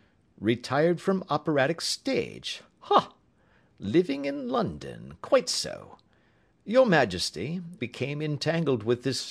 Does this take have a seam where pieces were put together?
yes; 1 cut; at 7.8 s

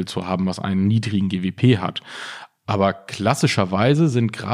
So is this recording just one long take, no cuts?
yes; 0 cuts

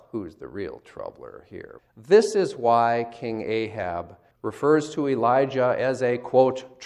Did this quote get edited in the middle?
yes; 2 cuts; at 1.8 s, 4.3 s

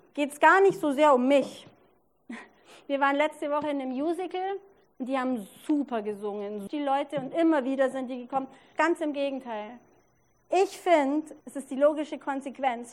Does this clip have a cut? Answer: yes; 3 cuts; at 6.7 s, 8.7 s, 11.4 s

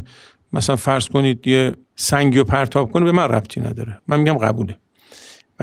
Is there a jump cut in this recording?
yes; 1 cut; at 1.8 s

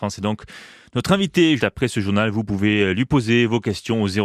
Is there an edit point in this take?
yes; 1 cut; at 1.6 s

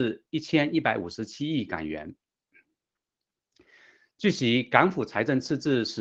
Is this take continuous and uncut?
yes; 0 cuts

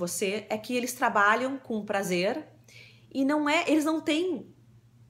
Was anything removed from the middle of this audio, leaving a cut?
no; 0 cuts

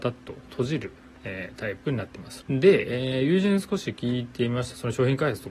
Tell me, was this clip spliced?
yes; 1 cut; at 2.4 s

